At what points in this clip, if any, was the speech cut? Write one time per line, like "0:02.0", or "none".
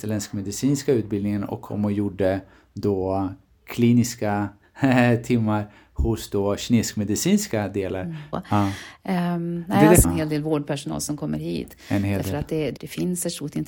0:08.3
0:10.0
0:12.8